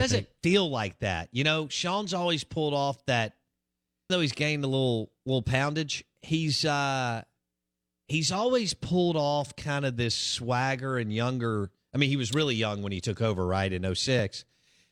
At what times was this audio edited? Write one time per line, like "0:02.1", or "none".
0:04.1